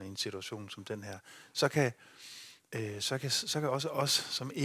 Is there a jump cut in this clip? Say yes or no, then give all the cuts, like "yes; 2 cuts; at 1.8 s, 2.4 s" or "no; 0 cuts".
yes; 1 cut; at 2.6 s